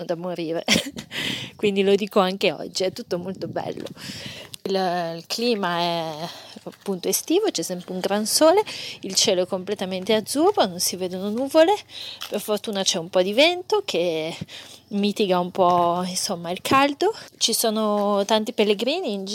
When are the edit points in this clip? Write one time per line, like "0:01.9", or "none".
none